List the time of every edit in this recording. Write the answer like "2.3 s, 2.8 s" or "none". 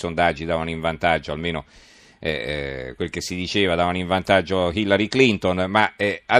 none